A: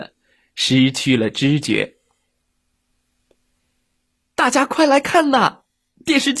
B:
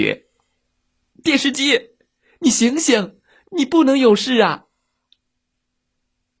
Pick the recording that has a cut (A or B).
B